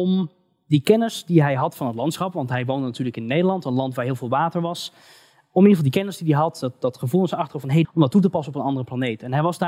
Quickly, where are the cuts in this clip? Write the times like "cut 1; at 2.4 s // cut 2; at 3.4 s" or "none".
cut 1; at 7.8 s